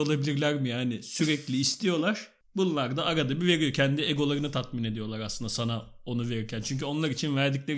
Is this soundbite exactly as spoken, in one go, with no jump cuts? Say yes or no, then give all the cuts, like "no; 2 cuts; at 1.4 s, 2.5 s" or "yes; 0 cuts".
yes; 0 cuts